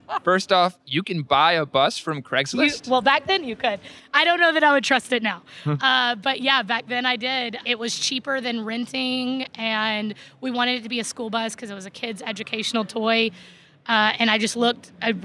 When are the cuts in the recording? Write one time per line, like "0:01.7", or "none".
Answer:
none